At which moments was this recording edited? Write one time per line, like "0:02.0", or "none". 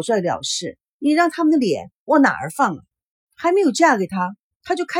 0:03.3